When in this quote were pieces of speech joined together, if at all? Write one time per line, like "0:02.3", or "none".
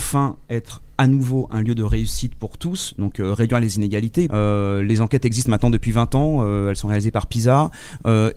0:04.3